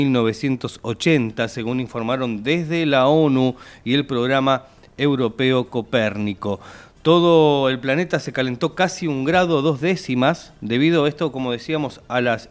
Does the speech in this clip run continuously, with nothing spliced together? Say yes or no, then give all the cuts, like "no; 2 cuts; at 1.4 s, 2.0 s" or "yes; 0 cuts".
yes; 0 cuts